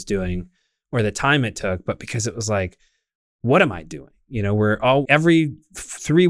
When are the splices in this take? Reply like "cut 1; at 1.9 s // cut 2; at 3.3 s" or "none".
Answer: cut 1; at 5.0 s